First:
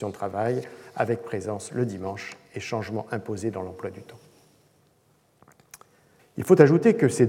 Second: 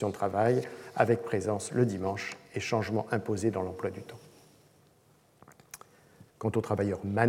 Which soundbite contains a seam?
first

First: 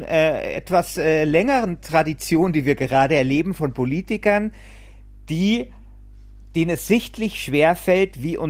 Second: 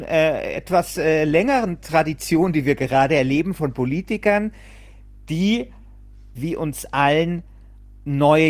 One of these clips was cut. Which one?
second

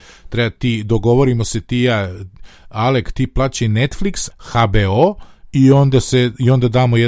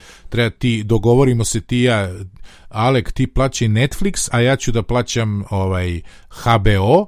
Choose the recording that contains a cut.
first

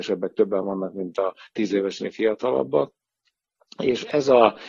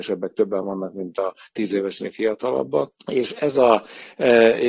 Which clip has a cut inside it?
second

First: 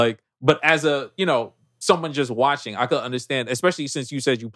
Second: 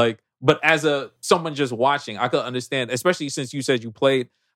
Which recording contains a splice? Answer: second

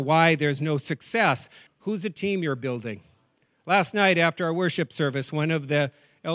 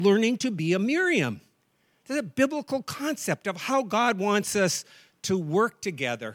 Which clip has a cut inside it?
first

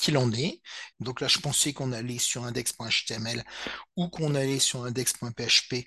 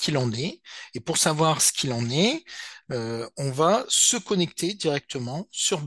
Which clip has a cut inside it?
first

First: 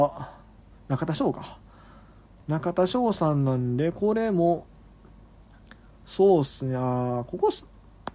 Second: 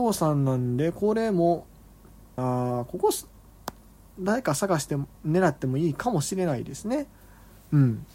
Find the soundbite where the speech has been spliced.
second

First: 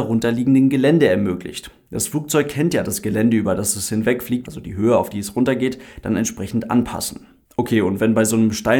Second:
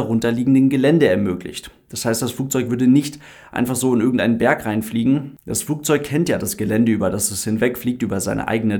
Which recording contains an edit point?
first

